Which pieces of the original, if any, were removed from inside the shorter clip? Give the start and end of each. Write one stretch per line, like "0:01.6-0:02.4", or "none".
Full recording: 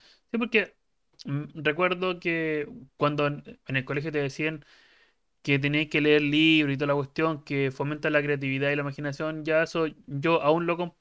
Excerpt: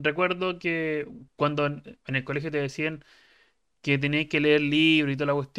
none